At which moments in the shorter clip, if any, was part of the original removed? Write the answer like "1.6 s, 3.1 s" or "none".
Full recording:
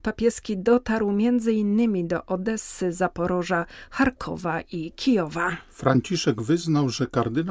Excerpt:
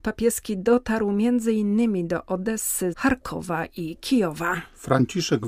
2.9 s